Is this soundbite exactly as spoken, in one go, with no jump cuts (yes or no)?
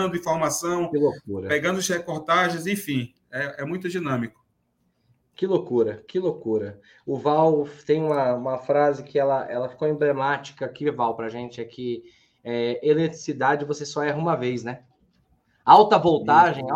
yes